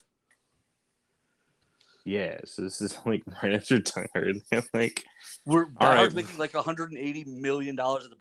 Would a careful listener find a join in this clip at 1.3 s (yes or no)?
no